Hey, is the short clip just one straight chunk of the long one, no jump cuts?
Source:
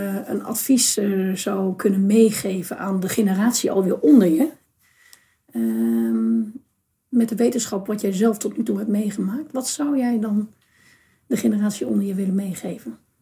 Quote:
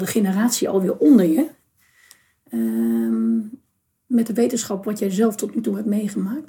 yes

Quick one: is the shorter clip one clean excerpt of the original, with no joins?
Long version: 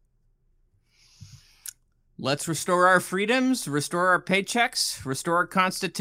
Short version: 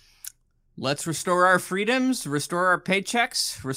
yes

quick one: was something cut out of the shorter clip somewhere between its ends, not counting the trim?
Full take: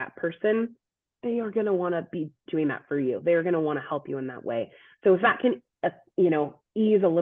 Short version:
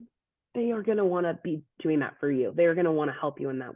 no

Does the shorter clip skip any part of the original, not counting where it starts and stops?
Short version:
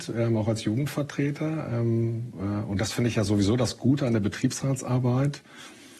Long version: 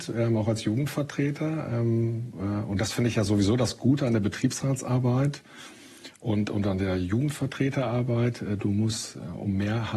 no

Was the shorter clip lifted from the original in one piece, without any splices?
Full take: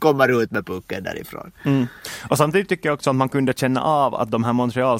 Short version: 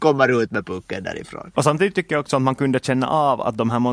no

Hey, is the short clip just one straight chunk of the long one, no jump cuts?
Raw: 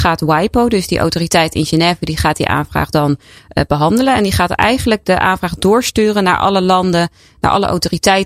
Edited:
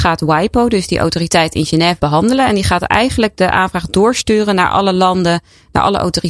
no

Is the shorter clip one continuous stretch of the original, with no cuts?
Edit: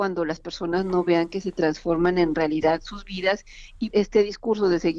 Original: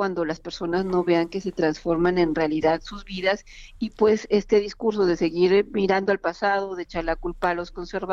no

